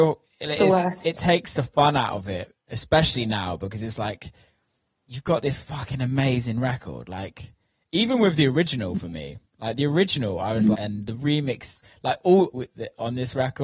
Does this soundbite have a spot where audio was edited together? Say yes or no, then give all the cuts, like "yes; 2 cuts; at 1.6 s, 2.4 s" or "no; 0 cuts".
yes; 2 cuts; at 10.7 s, 12.5 s